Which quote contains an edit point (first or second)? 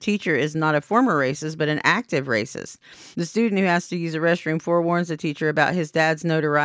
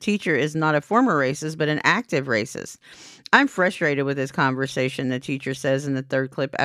first